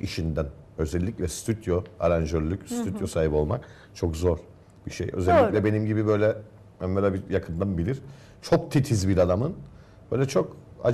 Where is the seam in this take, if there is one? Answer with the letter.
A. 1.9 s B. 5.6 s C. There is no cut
C